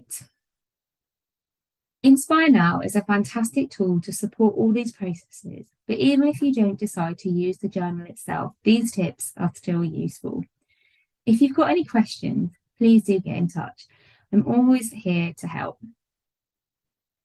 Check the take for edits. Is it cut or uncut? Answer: cut